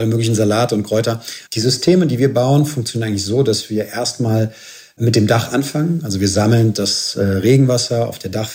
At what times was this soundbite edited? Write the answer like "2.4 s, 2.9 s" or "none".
1.5 s